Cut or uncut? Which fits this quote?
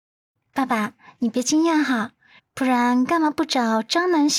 cut